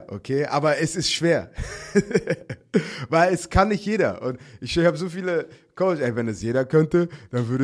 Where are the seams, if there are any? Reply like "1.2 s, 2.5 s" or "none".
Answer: none